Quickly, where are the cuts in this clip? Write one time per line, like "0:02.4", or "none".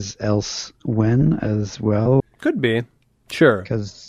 0:02.2